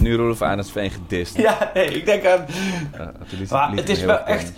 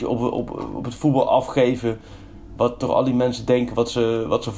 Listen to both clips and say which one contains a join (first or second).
first